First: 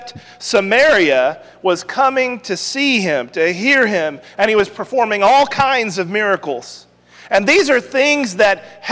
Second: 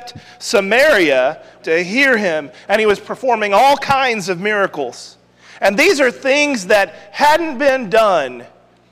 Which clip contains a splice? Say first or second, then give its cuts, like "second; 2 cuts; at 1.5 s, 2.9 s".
second; 1 cut; at 1.6 s